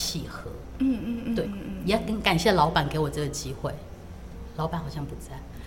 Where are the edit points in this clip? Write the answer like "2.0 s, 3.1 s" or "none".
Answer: 1.4 s